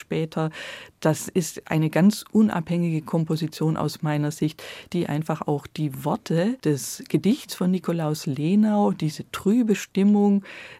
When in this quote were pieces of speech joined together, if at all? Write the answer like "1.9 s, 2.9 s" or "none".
none